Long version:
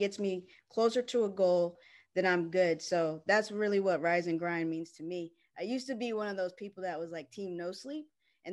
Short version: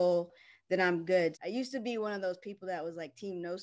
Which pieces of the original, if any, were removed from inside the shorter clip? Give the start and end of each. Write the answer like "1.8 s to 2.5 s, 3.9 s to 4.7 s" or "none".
2.8 s to 5.5 s